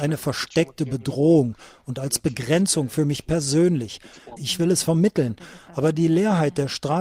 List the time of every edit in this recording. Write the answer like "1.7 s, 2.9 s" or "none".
4.4 s